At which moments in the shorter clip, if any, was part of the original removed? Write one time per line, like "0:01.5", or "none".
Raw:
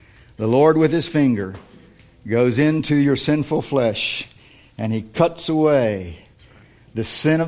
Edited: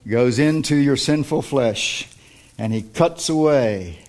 none